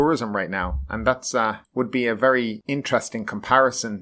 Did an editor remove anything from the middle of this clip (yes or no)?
no